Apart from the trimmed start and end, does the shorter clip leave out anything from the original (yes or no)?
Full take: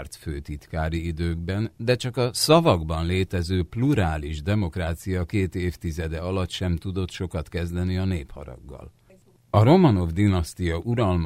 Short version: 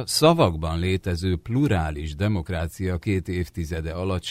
no